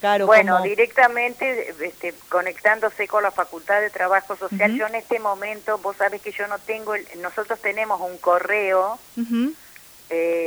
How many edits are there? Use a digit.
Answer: 0